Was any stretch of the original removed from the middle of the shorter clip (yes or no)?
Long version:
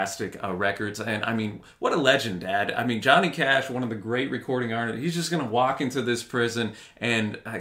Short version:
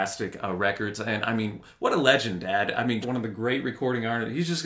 yes